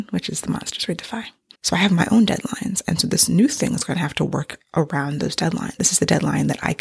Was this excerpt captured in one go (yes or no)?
no